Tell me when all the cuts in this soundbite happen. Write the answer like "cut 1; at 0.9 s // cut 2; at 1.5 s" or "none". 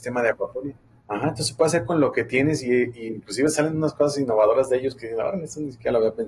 none